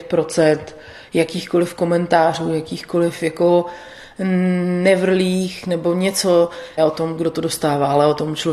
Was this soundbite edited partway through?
yes; 1 cut; at 6.8 s

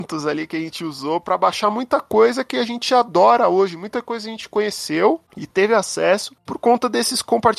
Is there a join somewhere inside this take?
no; 0 cuts

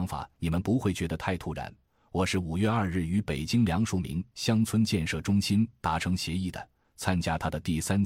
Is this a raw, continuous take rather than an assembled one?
yes; 0 cuts

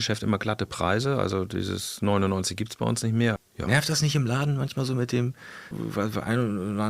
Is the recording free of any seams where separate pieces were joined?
no; 2 cuts; at 3.4 s, 5.7 s

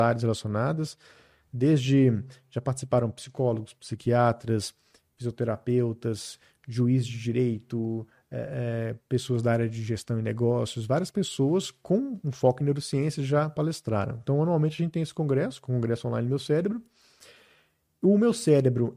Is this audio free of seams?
yes; 0 cuts

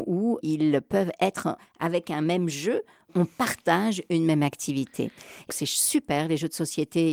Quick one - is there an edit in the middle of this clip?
yes; 1 cut; at 5.5 s

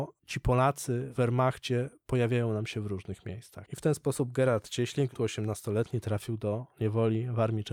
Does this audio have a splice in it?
yes; 2 cuts; at 3.7 s, 5.1 s

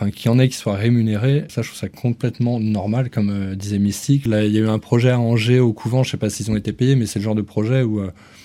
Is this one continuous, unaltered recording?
no; 2 cuts; at 1.5 s, 4.3 s

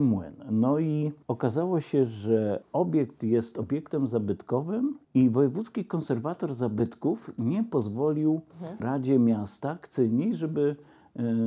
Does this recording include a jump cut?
yes; 2 cuts; at 1.2 s, 5.0 s

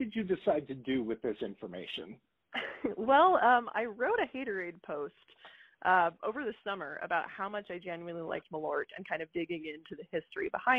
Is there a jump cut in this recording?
no; 0 cuts

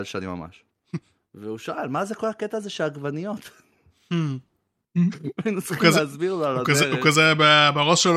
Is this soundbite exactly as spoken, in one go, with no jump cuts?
yes; 0 cuts

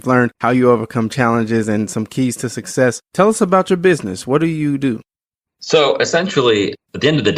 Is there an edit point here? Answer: no; 0 cuts

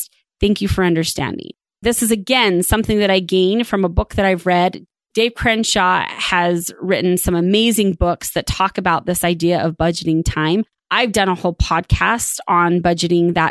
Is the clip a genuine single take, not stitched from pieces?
no; 1 cut; at 1.8 s

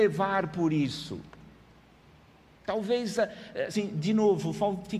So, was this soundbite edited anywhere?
yes; 2 cuts; at 2.6 s, 3.7 s

